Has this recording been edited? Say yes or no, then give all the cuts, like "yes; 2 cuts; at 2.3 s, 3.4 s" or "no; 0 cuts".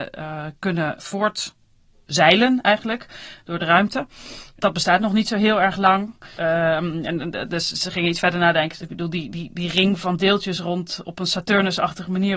yes; 2 cuts; at 6.4 s, 8.8 s